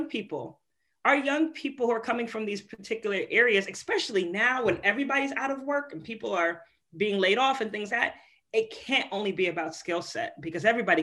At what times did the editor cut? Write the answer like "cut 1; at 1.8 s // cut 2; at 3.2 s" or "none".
cut 1; at 7.9 s